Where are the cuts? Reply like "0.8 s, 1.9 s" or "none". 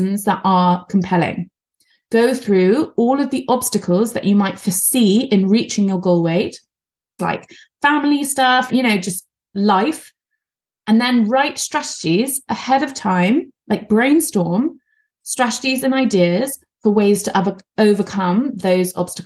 7.2 s, 8.7 s